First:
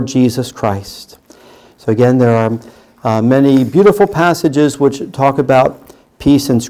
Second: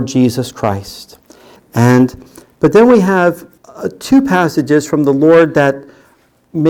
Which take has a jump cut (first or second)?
second